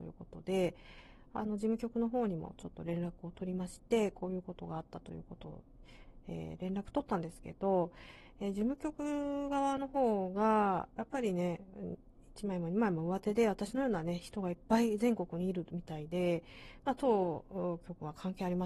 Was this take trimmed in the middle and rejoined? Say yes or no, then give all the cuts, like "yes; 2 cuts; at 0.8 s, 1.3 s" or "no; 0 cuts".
no; 0 cuts